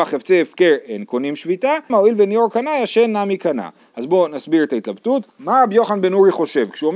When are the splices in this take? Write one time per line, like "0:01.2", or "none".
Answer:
0:01.9
0:05.3